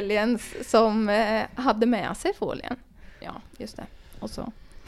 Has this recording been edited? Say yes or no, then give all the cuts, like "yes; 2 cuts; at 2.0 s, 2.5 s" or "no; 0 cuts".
yes; 1 cut; at 3.2 s